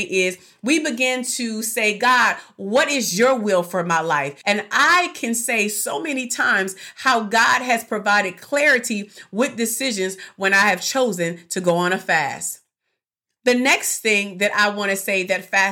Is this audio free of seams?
no; 1 cut; at 4.4 s

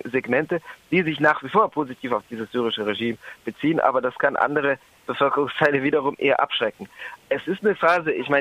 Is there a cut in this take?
yes; 1 cut; at 7.2 s

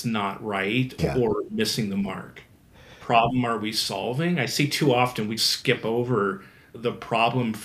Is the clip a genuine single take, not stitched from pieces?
no; 2 cuts; at 3.0 s, 5.4 s

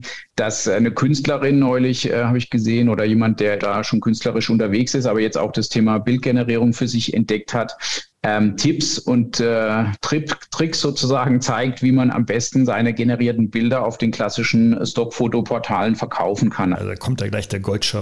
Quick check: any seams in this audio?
yes; 2 cuts; at 3.6 s, 16.7 s

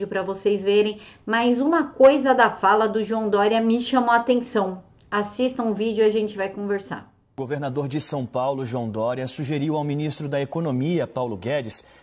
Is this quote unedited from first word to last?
yes; 0 cuts

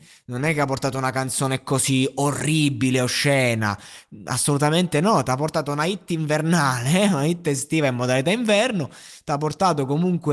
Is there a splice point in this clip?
no; 0 cuts

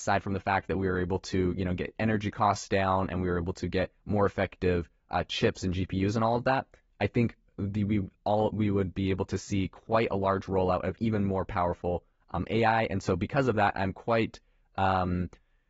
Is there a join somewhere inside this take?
no; 0 cuts

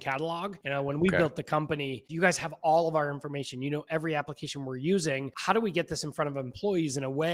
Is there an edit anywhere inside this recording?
yes; 1 cut; at 2.1 s

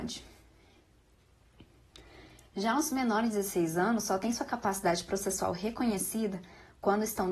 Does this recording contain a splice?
no; 0 cuts

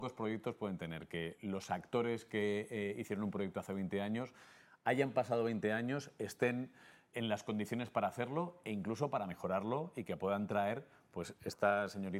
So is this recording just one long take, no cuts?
no; 1 cut; at 7.1 s

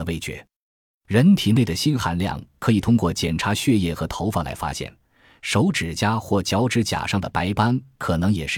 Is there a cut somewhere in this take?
yes; 1 cut; at 1.0 s

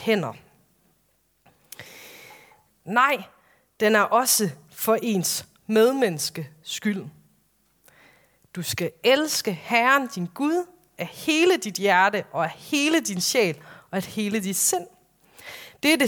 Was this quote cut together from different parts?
yes; 1 cut; at 2.7 s

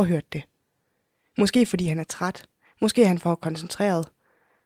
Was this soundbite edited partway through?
no; 0 cuts

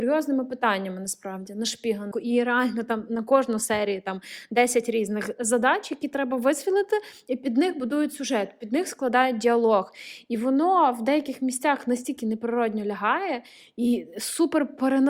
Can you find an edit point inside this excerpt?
yes; 1 cut; at 2.1 s

